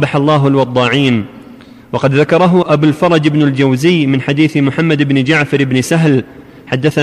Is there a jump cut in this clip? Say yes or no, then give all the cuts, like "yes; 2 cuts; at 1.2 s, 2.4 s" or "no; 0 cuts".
yes; 1 cut; at 2.6 s